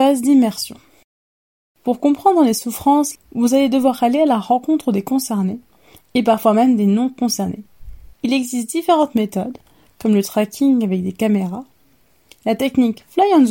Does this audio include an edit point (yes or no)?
yes